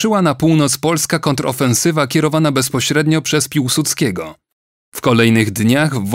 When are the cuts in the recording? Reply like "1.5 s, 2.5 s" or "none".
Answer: none